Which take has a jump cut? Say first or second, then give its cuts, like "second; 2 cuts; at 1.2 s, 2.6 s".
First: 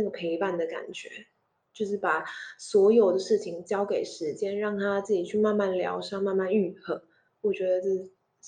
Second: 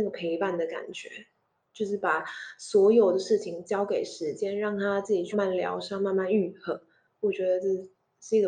second; 1 cut; at 5.3 s